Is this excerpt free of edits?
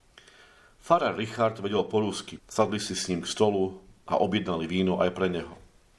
no; 1 cut; at 2.4 s

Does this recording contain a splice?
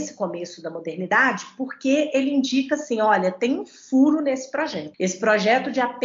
no; 0 cuts

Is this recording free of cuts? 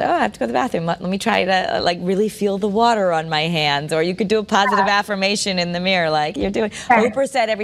no; 1 cut; at 6.4 s

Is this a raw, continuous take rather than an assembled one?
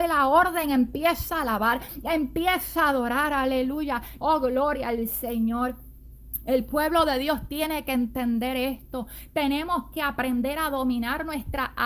no; 1 cut; at 4.2 s

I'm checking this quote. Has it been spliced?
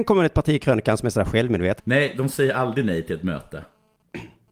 yes; 1 cut; at 1.8 s

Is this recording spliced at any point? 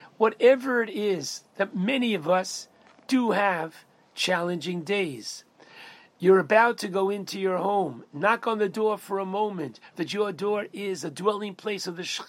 yes; 1 cut; at 9.9 s

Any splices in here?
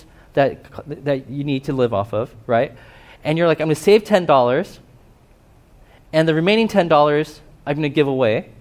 no; 0 cuts

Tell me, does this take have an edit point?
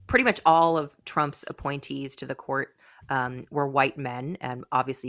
no; 0 cuts

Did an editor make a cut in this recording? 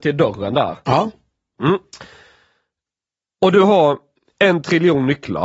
no; 0 cuts

